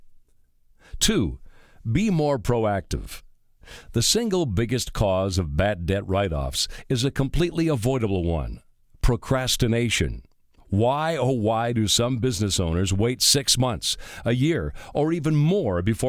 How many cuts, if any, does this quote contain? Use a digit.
0